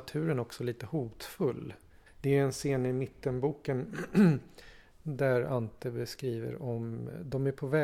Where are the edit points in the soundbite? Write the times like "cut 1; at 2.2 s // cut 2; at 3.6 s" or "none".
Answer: none